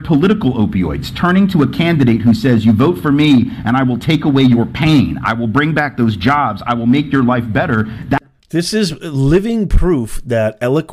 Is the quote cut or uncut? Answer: uncut